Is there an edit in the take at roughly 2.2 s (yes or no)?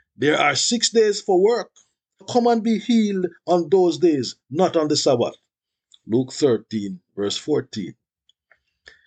yes